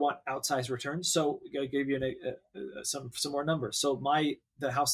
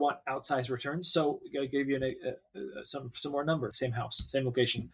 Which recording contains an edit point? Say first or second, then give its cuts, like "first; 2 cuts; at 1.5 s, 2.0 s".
second; 1 cut; at 3.7 s